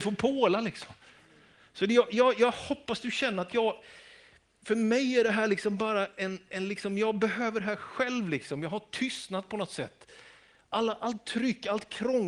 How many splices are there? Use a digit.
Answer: 0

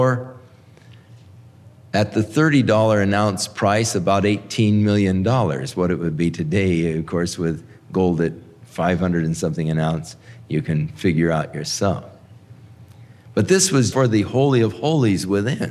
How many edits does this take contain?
1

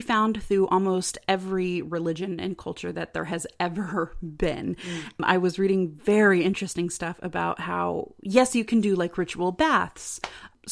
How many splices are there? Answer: 0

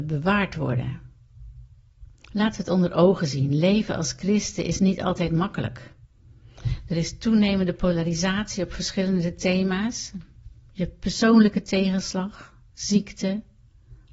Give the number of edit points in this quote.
0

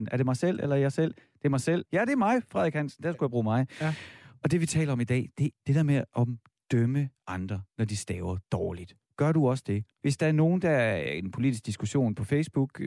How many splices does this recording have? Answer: 3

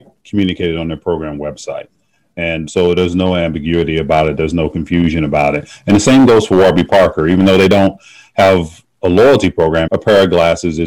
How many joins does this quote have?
2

